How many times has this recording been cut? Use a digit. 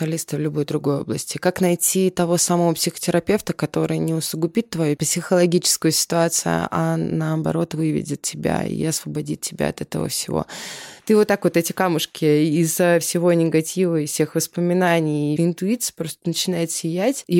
2